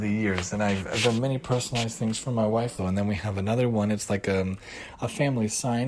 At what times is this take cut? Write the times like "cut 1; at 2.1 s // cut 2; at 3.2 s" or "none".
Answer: cut 1; at 2.8 s